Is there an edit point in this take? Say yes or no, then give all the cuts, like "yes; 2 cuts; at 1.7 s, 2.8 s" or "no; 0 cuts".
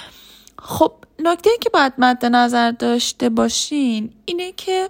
no; 0 cuts